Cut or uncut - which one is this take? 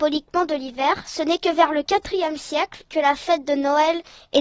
uncut